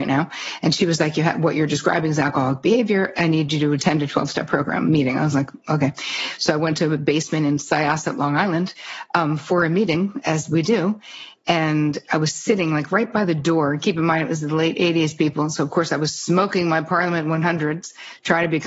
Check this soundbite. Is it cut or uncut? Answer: uncut